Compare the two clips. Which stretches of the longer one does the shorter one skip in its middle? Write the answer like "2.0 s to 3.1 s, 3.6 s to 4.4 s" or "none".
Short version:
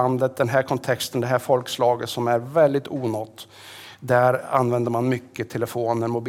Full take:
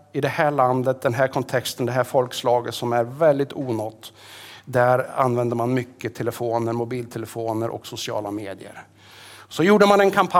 none

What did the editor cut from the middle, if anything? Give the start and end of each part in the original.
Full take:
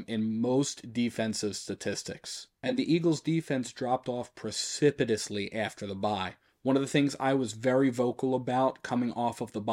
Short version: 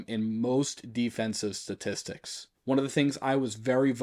2.5 s to 6.5 s

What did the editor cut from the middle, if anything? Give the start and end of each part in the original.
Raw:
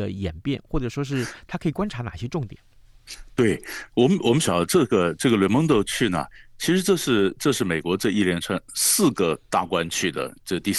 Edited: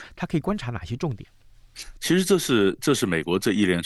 3.3 s to 6.5 s

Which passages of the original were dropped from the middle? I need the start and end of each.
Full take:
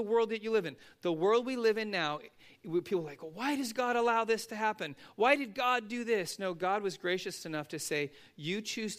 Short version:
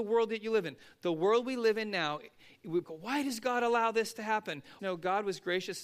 2.8 s to 3.2 s, 5.1 s to 6.4 s

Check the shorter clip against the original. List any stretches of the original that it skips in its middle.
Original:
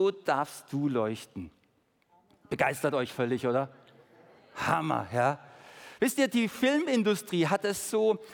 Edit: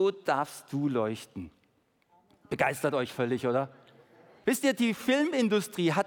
4.4 s to 6.0 s

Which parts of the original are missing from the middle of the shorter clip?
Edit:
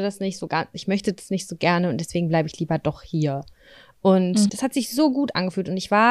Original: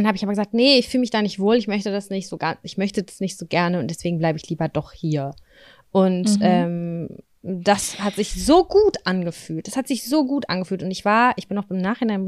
6.4 s to 9.6 s

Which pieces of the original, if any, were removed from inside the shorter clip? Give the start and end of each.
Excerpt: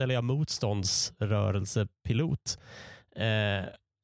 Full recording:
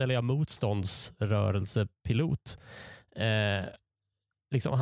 none

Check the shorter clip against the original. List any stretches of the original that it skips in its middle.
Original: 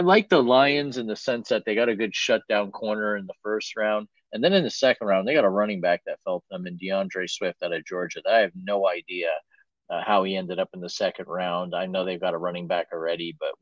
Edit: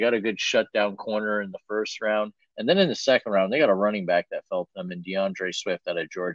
none

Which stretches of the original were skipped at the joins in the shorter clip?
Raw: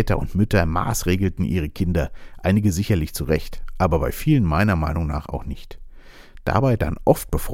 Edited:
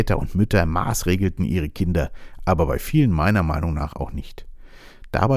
2.4 s to 3.7 s

